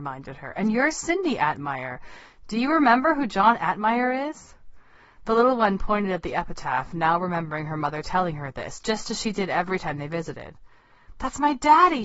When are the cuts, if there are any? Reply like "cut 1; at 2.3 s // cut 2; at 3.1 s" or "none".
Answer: none